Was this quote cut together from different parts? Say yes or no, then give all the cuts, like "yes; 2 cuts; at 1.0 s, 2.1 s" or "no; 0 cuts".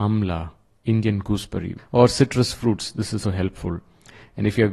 yes; 2 cuts; at 1.8 s, 3.2 s